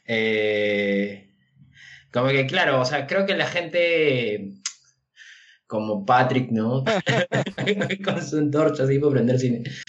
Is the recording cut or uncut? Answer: cut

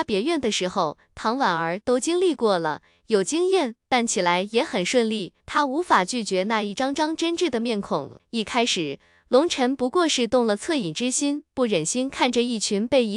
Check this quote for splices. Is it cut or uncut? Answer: cut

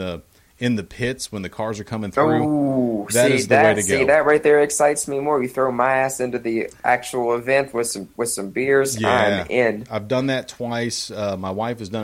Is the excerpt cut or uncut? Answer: uncut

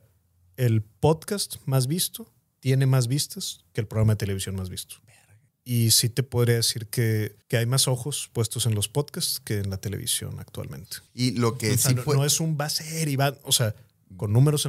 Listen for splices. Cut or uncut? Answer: cut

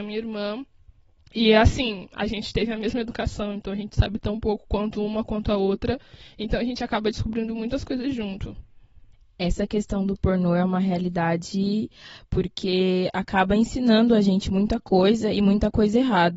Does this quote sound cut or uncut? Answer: uncut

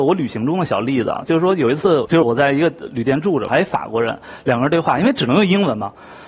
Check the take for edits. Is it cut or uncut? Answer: cut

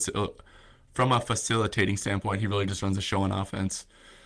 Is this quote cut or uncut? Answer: uncut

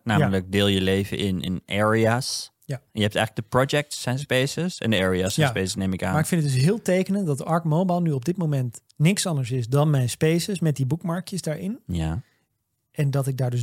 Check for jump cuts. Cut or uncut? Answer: cut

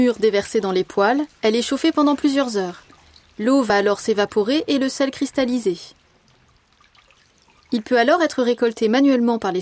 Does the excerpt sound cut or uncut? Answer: uncut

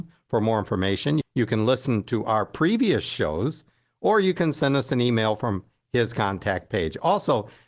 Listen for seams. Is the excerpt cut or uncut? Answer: cut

